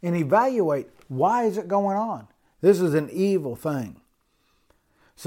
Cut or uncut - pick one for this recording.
cut